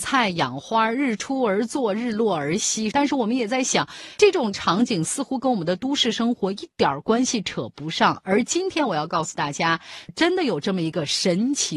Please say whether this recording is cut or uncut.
cut